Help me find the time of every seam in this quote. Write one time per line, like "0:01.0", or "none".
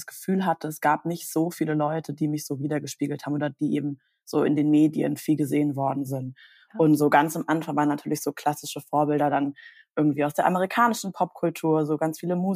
none